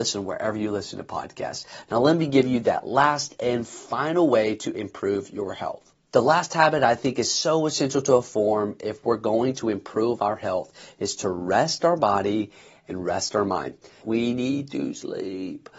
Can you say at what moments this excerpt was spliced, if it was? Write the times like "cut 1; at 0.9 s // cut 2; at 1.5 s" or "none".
cut 1; at 6.0 s // cut 2; at 14.0 s